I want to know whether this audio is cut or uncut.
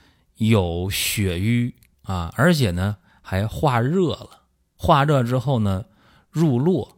cut